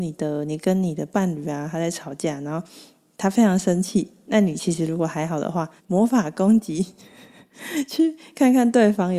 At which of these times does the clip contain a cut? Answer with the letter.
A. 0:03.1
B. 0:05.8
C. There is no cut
B